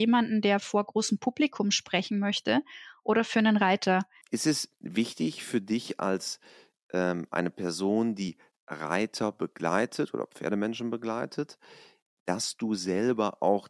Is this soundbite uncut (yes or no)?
no